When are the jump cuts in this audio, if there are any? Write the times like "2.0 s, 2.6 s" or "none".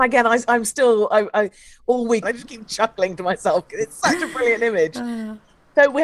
2.2 s